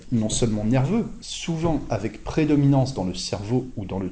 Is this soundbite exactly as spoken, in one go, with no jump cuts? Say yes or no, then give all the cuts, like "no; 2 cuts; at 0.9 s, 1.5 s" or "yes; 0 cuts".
no; 1 cut; at 1.2 s